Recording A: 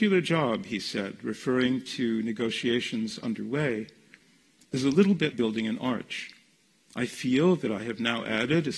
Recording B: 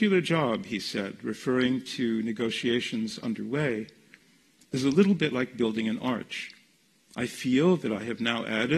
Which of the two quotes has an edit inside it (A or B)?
A